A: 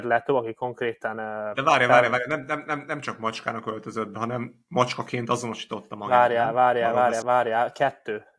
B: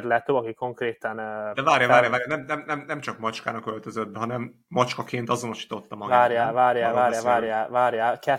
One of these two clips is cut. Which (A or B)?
A